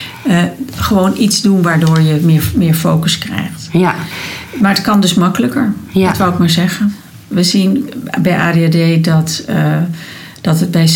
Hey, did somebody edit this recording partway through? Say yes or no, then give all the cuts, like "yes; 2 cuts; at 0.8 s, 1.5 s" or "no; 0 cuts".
no; 0 cuts